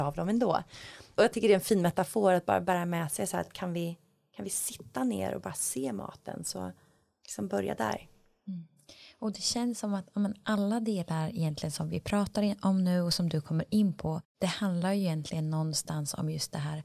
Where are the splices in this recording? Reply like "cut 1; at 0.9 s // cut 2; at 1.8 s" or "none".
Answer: none